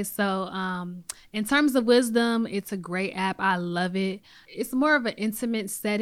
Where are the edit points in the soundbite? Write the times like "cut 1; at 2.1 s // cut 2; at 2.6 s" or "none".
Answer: none